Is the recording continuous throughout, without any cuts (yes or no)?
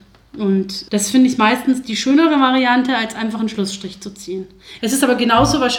no